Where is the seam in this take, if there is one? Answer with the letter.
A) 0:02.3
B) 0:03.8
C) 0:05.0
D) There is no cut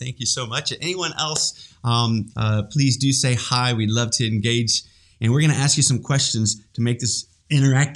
A